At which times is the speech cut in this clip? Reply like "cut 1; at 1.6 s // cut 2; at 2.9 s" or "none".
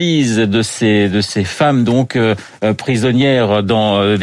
none